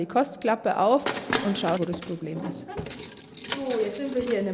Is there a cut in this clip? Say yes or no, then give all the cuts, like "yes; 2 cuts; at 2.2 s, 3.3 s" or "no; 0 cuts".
yes; 1 cut; at 1.8 s